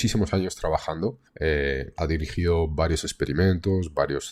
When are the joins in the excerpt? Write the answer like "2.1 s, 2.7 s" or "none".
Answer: 1.3 s